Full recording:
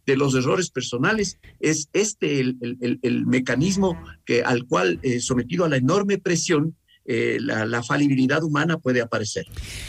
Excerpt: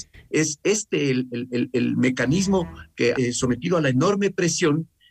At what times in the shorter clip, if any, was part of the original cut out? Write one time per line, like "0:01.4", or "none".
0:03.1